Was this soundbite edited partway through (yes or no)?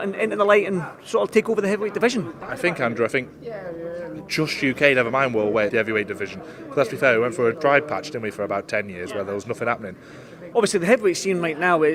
yes